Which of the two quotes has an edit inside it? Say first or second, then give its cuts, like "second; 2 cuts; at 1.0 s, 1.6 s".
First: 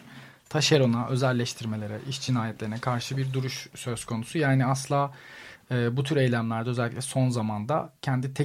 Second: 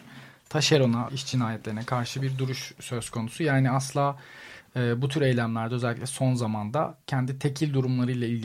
second; 1 cut; at 1.1 s